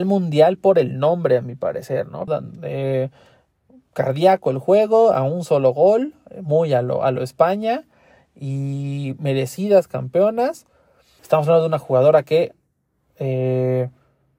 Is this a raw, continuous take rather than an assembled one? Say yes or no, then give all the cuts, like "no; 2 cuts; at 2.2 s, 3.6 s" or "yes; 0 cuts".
no; 2 cuts; at 2.3 s, 11.2 s